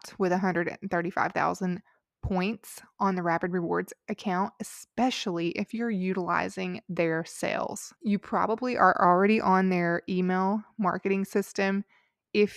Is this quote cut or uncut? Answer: uncut